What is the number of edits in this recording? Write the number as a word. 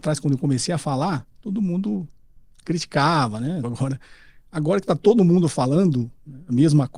one